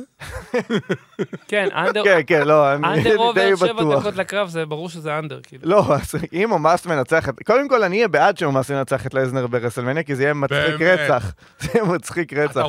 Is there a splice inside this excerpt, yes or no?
no